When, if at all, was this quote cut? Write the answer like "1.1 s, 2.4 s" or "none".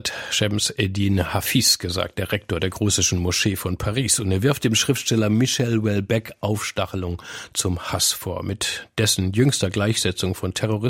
none